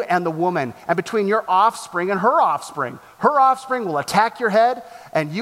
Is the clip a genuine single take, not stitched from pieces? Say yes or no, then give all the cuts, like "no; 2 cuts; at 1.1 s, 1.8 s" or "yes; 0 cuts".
yes; 0 cuts